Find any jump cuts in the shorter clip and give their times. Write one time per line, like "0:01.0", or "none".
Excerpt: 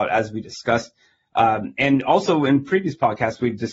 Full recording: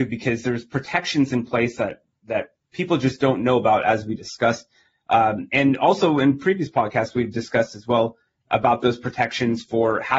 none